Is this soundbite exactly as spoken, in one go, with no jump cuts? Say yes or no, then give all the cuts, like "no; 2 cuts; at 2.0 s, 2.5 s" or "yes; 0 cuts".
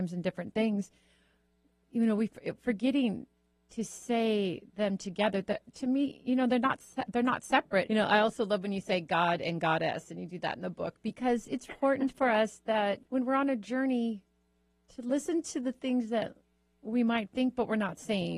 no; 3 cuts; at 7.9 s, 11.7 s, 13.1 s